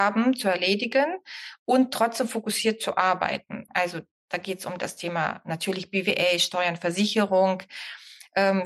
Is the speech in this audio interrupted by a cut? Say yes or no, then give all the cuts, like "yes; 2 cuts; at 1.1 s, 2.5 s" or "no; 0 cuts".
yes; 1 cut; at 3.7 s